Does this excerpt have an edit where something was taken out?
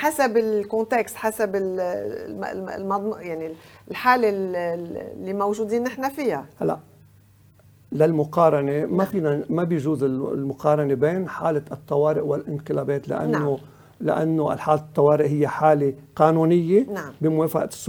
no; 0 cuts

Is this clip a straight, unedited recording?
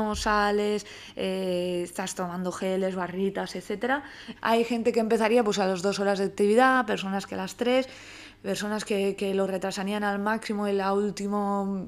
no; 1 cut; at 4.4 s

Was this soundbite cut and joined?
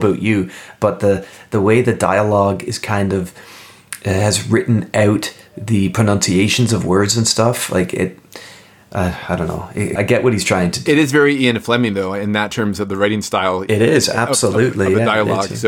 yes; 1 cut; at 10.0 s

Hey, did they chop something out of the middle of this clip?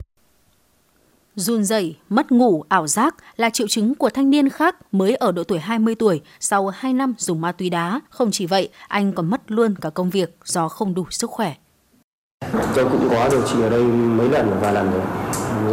yes; 1 cut; at 8.1 s

